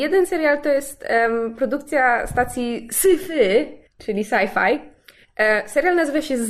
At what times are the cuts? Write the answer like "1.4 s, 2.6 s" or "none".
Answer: 3.9 s